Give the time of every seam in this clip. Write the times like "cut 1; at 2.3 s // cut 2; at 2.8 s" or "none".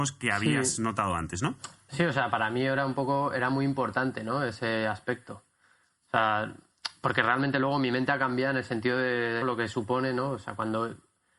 cut 1; at 9.4 s